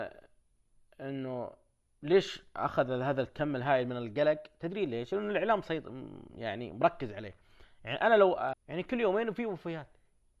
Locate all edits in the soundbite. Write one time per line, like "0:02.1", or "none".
0:08.5